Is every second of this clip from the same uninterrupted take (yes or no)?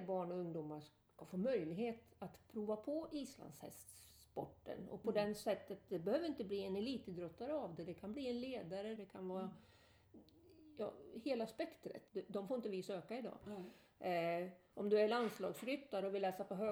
no